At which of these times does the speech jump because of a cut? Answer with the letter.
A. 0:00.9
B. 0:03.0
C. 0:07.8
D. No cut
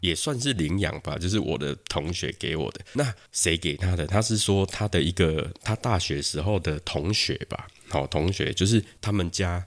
D